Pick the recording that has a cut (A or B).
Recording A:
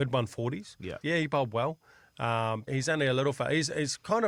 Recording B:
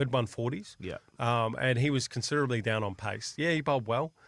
A